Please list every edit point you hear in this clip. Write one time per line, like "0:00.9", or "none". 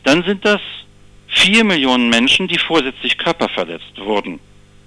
none